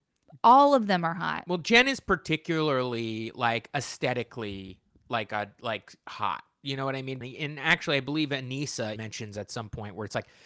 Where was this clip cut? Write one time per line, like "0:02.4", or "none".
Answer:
0:07.2
0:09.0